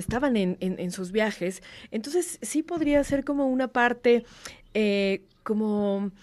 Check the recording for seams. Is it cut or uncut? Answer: uncut